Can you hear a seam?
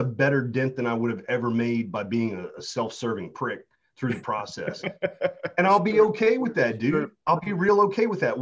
no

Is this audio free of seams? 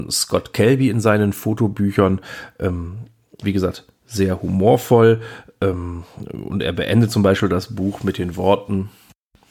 no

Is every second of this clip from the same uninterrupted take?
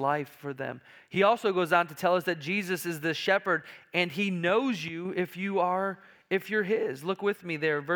yes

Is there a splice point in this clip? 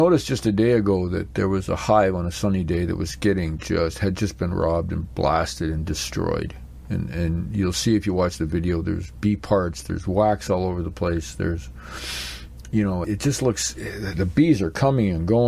yes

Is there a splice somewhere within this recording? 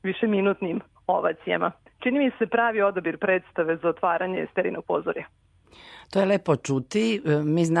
no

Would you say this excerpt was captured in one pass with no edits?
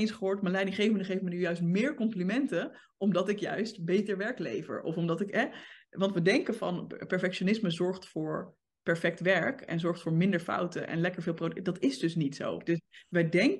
no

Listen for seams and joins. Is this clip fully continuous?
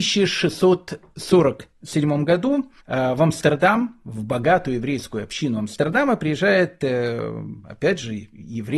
no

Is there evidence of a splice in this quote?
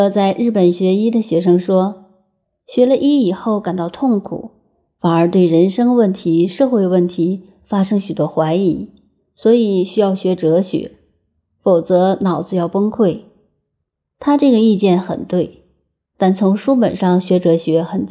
no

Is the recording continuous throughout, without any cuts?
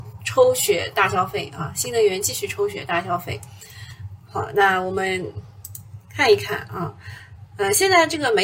yes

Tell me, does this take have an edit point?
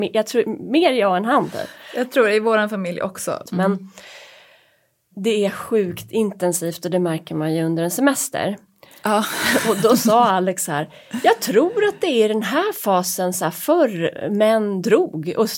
yes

